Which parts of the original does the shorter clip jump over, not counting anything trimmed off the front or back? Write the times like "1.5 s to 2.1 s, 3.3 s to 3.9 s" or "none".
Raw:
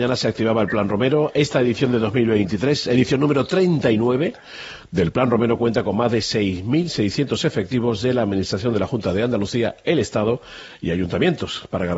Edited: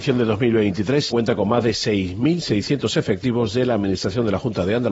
2.8 s to 5.6 s